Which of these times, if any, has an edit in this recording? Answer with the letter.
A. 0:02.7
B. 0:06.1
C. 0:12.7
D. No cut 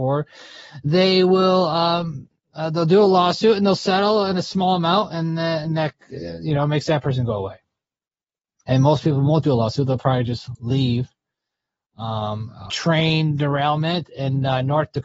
C